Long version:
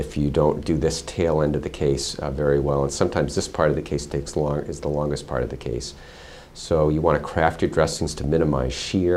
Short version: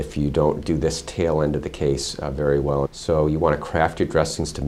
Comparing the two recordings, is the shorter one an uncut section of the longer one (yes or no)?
no